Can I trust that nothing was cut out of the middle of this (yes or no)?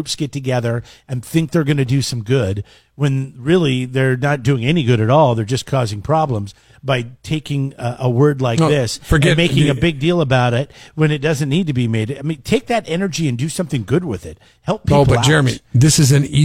yes